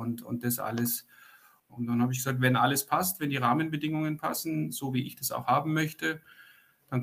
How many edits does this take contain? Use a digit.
1